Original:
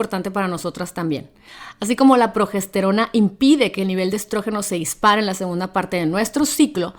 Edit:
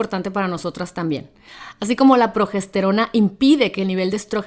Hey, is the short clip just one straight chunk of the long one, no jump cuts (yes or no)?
yes